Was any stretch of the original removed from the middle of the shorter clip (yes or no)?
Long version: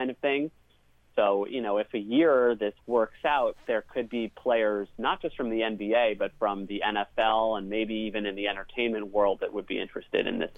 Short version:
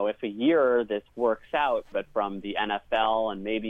yes